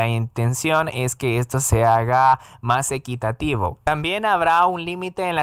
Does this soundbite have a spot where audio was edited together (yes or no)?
yes